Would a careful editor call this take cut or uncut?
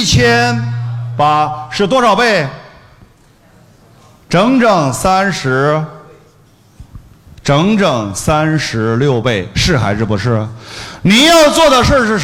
uncut